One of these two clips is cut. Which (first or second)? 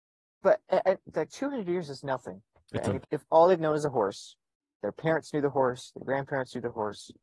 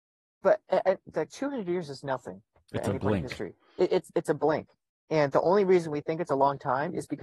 first